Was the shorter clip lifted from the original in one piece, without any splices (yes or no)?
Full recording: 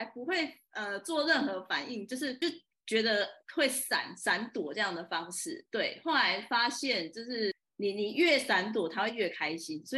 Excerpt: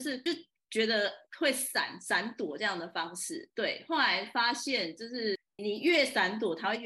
no